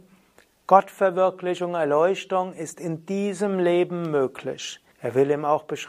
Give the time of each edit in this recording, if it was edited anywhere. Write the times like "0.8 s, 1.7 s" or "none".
4.9 s